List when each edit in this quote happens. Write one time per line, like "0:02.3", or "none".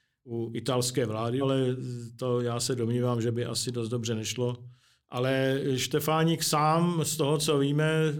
0:01.4
0:05.0